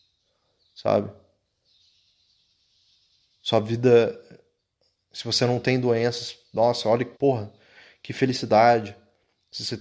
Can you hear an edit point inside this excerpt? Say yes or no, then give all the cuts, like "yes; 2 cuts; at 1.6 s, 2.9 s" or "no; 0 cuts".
yes; 1 cut; at 7.2 s